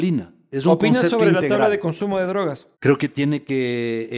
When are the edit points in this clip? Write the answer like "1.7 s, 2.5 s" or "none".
2.7 s